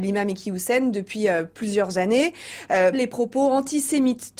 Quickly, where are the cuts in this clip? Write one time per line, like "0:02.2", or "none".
0:02.9